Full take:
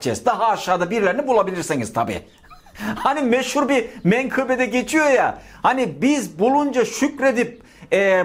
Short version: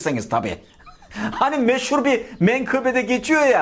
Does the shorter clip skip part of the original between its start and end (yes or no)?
no